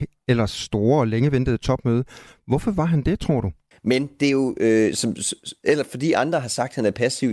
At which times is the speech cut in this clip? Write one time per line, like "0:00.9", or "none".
0:03.7